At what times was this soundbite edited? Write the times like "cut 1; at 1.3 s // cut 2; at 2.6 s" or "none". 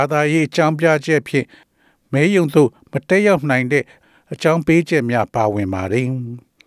none